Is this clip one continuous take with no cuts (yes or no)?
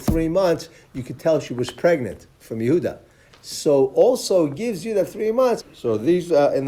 no